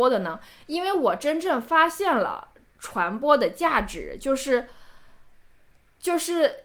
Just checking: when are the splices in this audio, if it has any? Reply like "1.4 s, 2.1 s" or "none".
none